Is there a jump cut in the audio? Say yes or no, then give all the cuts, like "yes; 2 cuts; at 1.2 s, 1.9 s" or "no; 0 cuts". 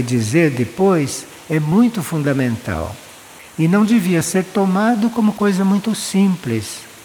no; 0 cuts